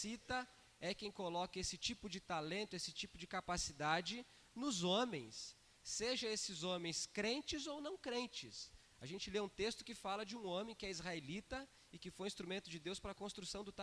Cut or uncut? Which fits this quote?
uncut